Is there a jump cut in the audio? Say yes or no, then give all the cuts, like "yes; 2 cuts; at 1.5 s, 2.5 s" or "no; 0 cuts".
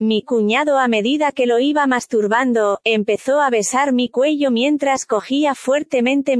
no; 0 cuts